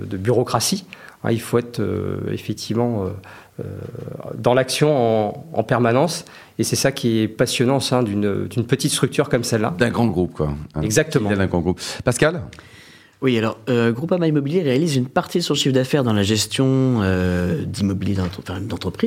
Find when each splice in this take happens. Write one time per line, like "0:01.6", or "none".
none